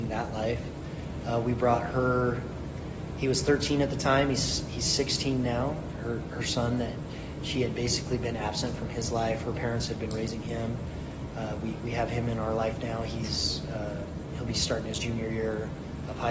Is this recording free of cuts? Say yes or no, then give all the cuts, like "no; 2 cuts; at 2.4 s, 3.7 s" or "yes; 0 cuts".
yes; 0 cuts